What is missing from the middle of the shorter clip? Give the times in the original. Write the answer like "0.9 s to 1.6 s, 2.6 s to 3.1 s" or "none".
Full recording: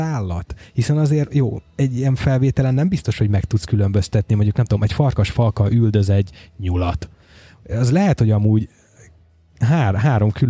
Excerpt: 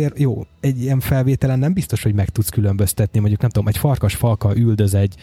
none